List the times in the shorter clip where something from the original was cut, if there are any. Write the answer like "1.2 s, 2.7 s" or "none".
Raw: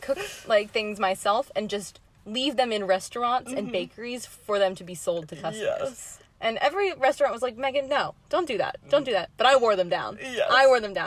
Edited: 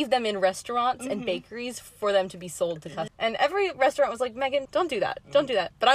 3.1 s, 4.7 s